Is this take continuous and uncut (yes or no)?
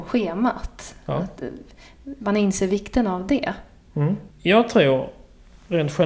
no